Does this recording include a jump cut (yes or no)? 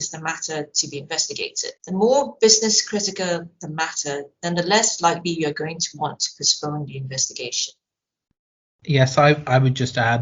yes